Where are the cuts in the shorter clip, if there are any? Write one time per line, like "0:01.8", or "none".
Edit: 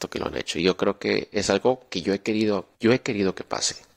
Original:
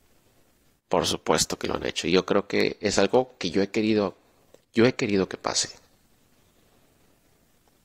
0:02.7